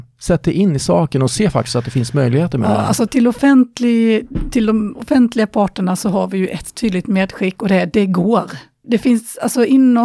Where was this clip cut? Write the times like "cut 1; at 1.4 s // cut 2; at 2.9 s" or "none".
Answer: cut 1; at 3.1 s // cut 2; at 8.8 s

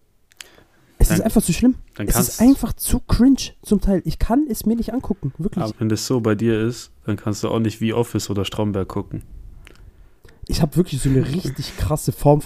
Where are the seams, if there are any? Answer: cut 1; at 5.7 s // cut 2; at 10.5 s

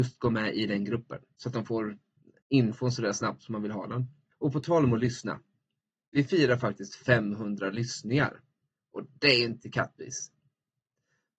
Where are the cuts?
cut 1; at 4.3 s

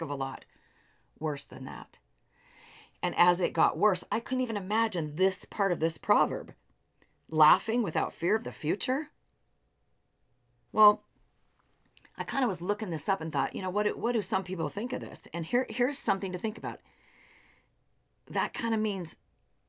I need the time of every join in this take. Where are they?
cut 1; at 10.7 s

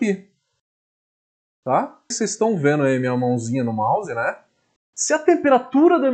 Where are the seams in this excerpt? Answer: cut 1; at 2.1 s // cut 2; at 4.8 s

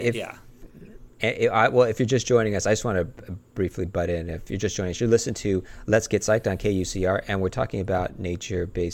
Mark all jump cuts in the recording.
none

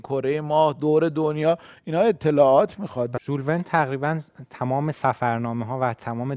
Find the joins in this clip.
cut 1; at 3.2 s

